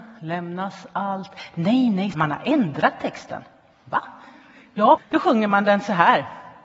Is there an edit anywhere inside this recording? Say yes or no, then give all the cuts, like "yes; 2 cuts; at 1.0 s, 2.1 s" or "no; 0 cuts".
yes; 2 cuts; at 2.1 s, 5.0 s